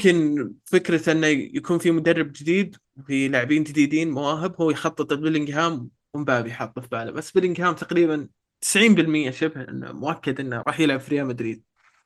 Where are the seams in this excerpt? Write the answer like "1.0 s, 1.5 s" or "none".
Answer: 10.6 s